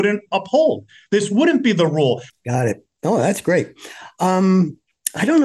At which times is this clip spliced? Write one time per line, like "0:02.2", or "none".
0:02.3